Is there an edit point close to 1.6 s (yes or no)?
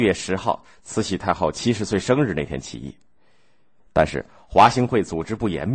no